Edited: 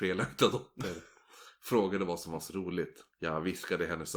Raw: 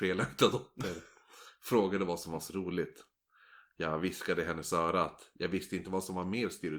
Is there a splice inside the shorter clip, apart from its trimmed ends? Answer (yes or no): yes